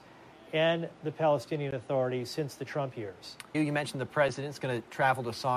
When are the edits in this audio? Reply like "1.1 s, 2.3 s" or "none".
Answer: 3.5 s